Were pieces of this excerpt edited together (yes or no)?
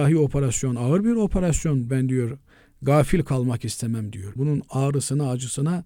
yes